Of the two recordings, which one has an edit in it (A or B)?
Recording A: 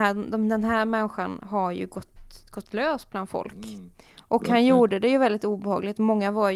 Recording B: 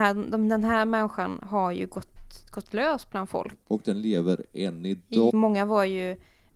B